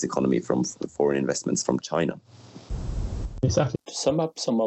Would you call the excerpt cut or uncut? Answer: cut